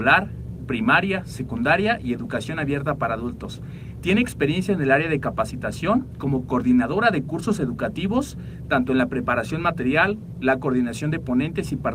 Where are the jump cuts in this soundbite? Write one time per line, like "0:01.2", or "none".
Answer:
0:04.0